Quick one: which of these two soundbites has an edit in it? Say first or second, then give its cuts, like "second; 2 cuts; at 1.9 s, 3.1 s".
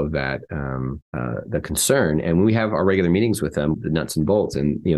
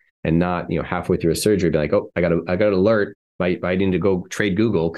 first; 2 cuts; at 1.1 s, 3.7 s